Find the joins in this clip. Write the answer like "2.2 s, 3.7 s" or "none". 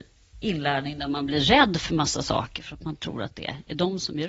none